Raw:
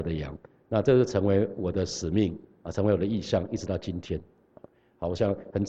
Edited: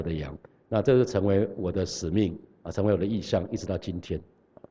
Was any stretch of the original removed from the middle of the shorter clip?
no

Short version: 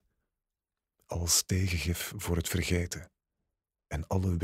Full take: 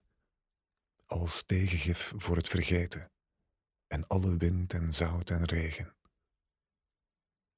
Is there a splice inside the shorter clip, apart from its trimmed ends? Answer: no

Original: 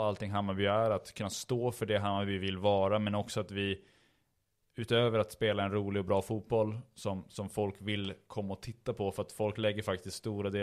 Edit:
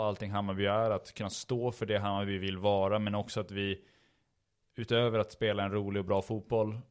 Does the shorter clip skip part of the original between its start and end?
no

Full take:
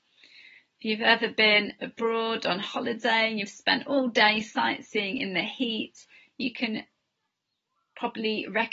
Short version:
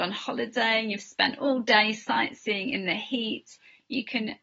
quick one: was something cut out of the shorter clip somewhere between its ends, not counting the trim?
no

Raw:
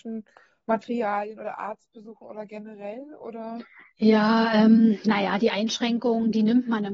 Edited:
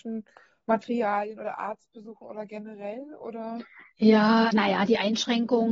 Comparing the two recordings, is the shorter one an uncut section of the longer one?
no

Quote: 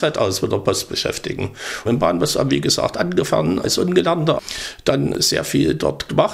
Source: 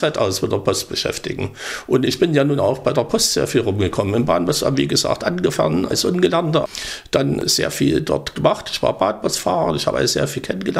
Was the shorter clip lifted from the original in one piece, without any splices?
no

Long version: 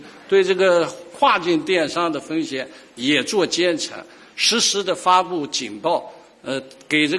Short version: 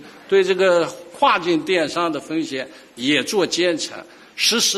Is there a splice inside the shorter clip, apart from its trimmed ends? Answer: no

